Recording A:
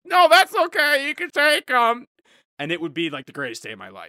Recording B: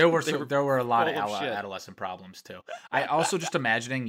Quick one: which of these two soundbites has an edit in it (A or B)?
A